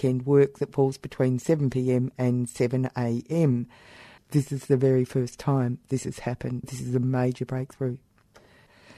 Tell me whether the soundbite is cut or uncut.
cut